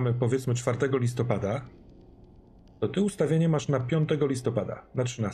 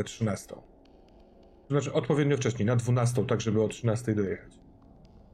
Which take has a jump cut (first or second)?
second